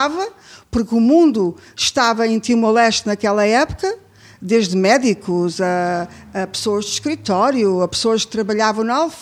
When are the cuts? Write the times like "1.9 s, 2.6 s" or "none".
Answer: none

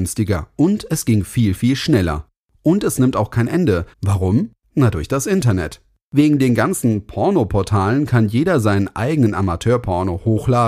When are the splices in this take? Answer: 3.9 s

